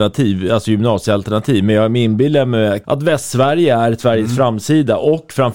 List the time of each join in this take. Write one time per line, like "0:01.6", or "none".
0:02.8